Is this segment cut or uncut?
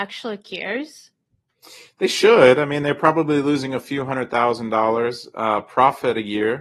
uncut